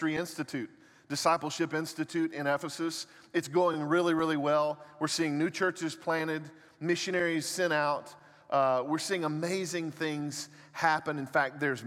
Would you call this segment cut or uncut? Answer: uncut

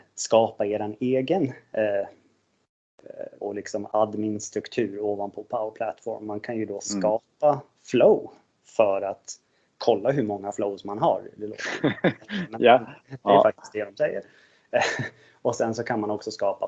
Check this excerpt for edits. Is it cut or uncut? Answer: cut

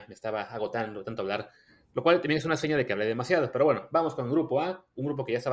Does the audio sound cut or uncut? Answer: uncut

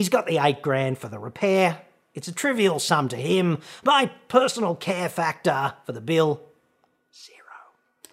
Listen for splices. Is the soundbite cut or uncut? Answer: uncut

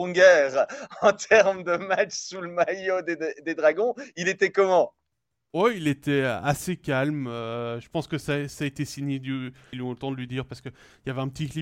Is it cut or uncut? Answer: cut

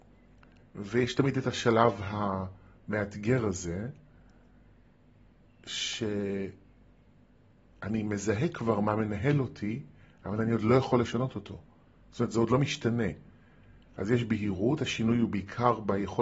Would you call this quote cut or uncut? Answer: uncut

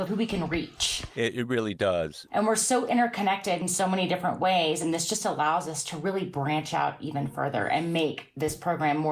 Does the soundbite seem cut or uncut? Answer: uncut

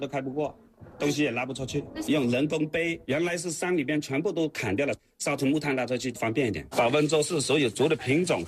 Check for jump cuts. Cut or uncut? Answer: cut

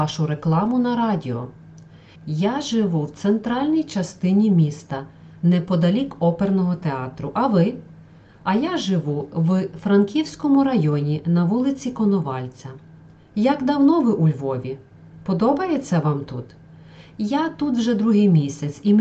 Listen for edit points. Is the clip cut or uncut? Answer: cut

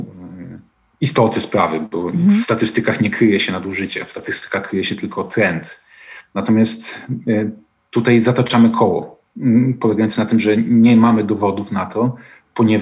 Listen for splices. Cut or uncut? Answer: uncut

